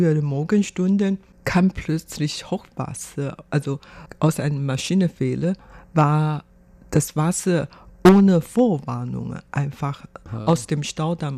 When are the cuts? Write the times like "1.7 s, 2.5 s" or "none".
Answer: none